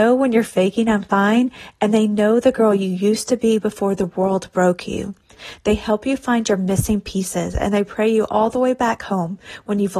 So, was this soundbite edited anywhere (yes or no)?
no